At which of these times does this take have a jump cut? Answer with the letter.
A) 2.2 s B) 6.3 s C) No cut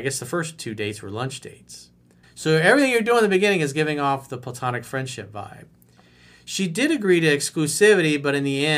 A